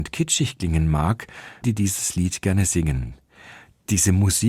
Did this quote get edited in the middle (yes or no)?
yes